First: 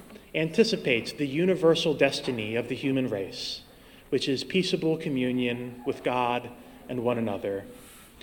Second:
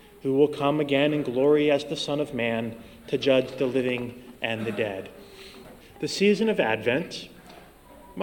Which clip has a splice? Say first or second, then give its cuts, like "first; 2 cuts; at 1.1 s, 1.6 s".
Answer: second; 1 cut; at 5.8 s